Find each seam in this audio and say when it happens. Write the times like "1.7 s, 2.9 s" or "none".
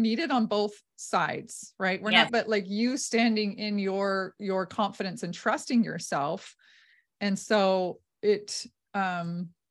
2.3 s